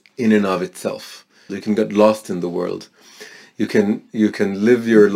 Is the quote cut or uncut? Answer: cut